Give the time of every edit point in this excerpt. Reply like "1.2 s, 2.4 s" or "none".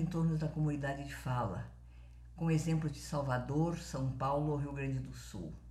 none